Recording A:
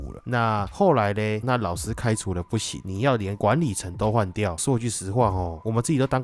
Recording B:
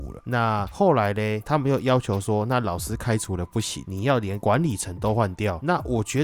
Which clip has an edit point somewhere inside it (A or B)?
A